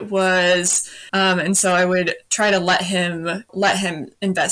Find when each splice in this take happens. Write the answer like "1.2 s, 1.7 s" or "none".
1.1 s, 3.5 s